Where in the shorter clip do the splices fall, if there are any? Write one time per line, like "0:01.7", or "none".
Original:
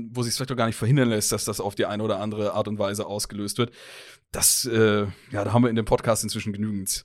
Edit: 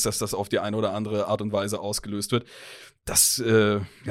none